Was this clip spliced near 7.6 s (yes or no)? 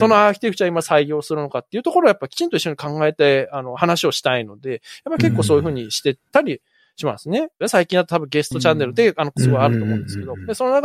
yes